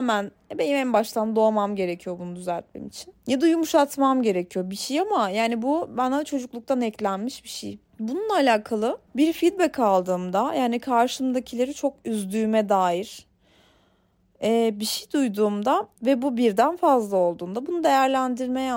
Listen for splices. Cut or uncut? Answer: uncut